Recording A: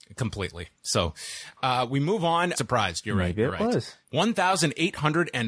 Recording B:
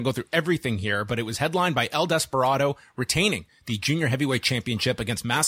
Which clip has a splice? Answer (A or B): A